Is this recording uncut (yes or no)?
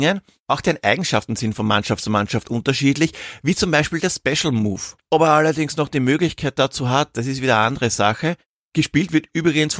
no